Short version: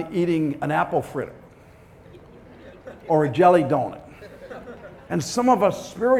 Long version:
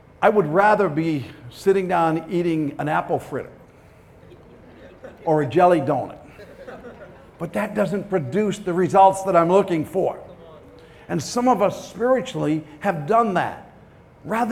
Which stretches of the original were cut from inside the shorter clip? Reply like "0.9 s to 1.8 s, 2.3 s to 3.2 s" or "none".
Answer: 7.2 s to 11.1 s